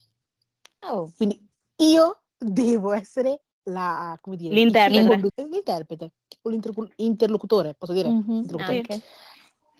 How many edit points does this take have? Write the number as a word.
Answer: two